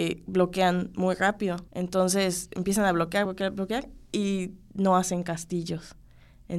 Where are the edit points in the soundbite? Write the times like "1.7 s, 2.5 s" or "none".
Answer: 1.7 s, 3.3 s